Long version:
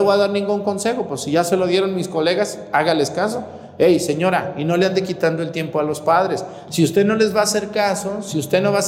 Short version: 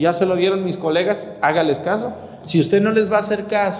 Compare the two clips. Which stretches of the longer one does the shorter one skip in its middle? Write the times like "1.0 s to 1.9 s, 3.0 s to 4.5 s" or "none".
3.7 s to 6.6 s